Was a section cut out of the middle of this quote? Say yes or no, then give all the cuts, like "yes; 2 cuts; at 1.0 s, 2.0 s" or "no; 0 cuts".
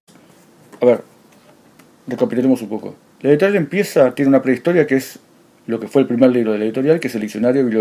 no; 0 cuts